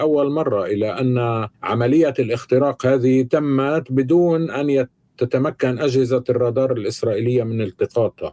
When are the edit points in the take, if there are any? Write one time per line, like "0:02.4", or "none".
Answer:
0:01.5

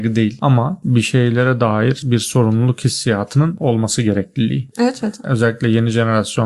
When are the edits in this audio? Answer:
none

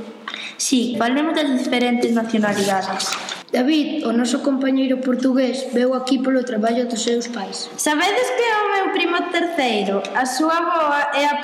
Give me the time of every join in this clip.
0:00.9

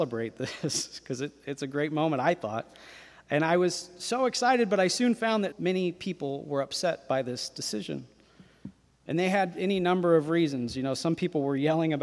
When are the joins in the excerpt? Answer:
0:05.5

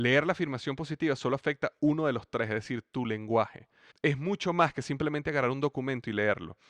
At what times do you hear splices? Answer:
0:03.9

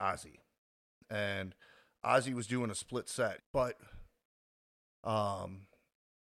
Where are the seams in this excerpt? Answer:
0:03.4

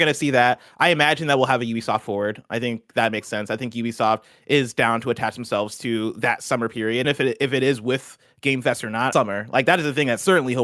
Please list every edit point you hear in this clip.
0:07.0
0:09.1

